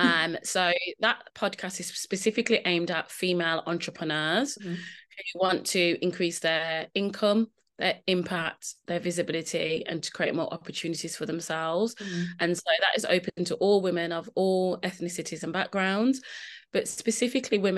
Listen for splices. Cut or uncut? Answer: uncut